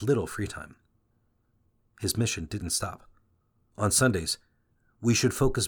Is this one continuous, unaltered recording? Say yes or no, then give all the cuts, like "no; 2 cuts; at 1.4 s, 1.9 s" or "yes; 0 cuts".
no; 2 cuts; at 1.8 s, 3.7 s